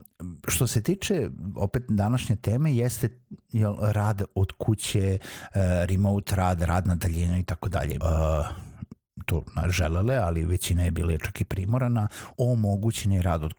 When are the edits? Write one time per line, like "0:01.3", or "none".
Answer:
0:08.0
0:12.3